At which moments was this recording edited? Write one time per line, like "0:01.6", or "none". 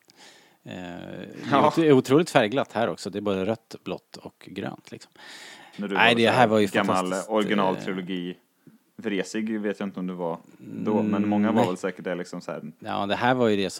0:05.7
0:12.8